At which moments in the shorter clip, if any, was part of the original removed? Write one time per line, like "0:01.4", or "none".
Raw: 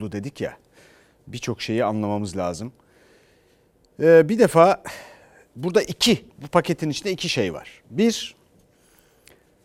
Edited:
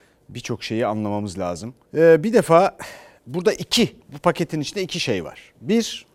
0:01.8
0:03.2